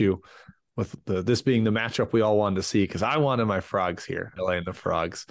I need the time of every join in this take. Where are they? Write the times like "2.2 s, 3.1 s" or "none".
4.4 s